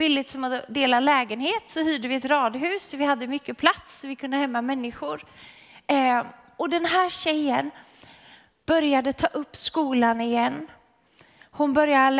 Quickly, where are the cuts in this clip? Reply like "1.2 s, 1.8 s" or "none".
none